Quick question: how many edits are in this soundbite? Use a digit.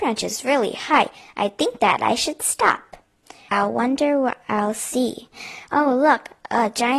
1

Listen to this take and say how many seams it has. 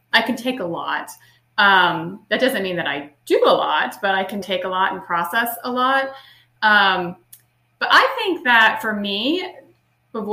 1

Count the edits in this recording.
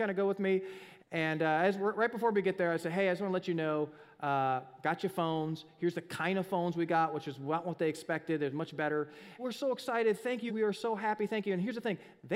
3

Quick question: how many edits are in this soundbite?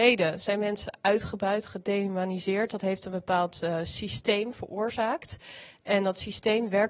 0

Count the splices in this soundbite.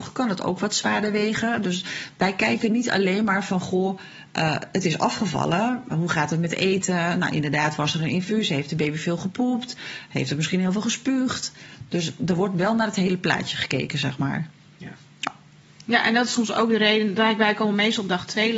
1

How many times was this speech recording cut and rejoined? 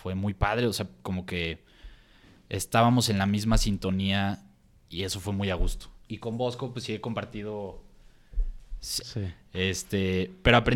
2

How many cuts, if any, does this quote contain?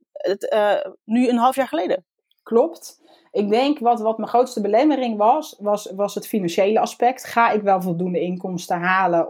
0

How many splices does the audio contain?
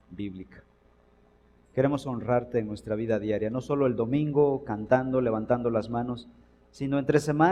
0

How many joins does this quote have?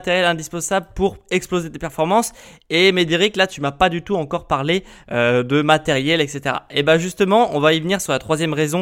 0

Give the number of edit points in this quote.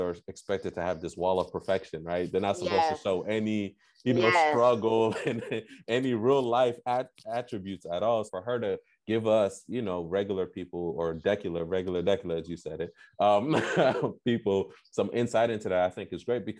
1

